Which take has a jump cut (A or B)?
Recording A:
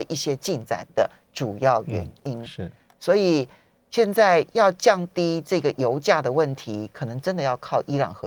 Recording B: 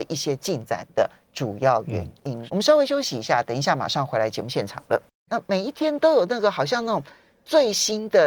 B